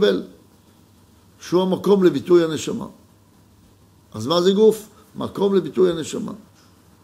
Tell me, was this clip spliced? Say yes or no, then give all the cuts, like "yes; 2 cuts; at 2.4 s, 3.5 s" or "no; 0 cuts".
no; 0 cuts